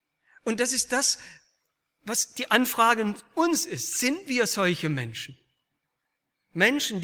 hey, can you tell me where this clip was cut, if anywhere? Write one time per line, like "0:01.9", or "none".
none